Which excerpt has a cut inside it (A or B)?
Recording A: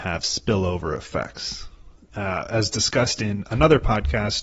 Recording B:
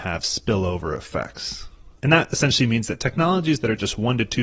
B